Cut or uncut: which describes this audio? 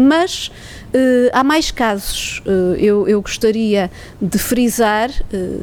uncut